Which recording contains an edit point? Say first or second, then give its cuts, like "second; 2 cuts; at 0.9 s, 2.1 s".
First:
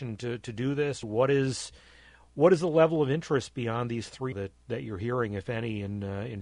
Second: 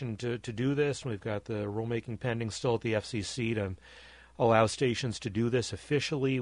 first; 2 cuts; at 1.0 s, 4.3 s